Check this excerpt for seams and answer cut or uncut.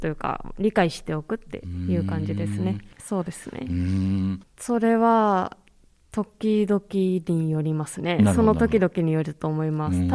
cut